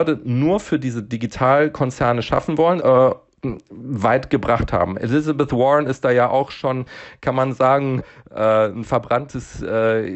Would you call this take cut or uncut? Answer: cut